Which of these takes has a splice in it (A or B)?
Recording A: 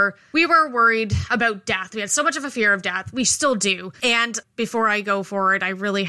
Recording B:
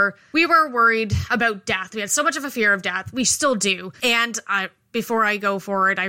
A